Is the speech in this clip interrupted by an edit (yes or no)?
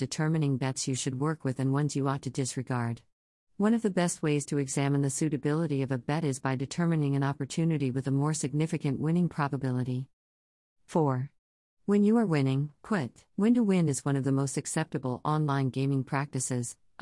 yes